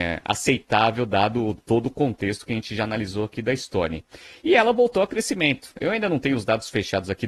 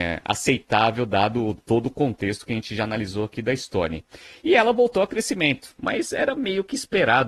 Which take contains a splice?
second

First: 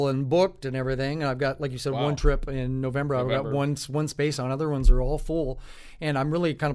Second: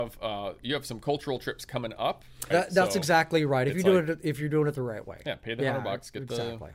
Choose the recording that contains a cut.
second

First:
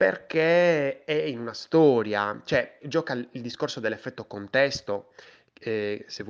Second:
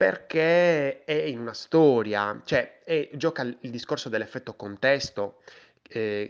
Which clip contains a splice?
first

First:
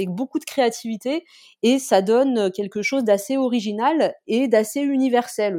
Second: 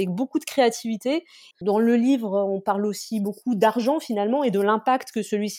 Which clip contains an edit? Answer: second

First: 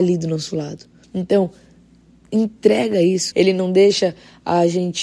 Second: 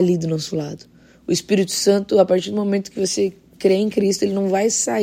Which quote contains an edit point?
first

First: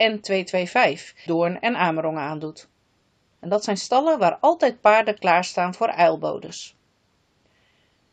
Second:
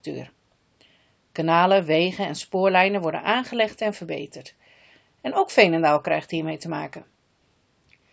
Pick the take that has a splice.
first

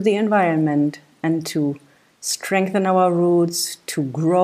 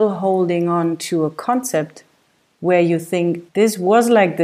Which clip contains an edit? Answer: second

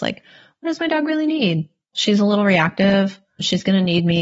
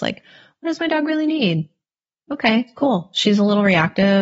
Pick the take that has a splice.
first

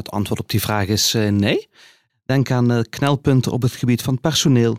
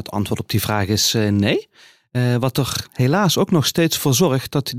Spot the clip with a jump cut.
first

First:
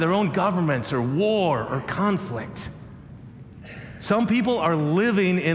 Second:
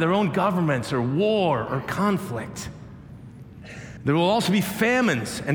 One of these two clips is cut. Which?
second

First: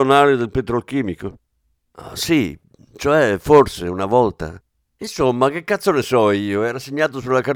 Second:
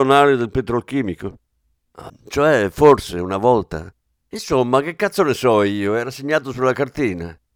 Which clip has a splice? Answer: second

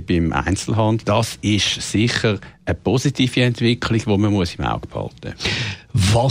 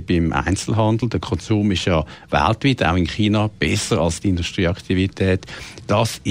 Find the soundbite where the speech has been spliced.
first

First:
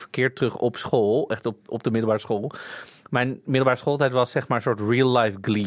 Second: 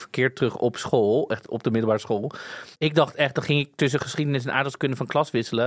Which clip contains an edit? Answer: second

